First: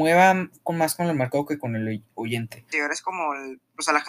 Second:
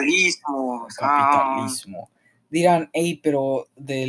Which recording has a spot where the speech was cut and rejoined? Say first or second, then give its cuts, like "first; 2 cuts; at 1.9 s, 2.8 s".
first; 1 cut; at 2.7 s